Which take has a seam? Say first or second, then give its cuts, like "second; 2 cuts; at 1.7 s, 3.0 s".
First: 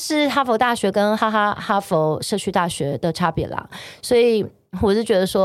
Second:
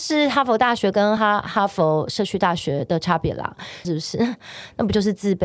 second; 2 cuts; at 1.2 s, 3.8 s